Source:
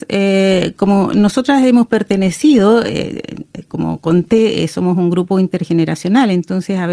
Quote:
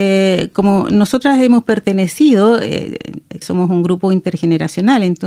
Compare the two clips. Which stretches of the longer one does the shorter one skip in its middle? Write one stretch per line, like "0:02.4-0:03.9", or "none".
0:03.7-0:04.7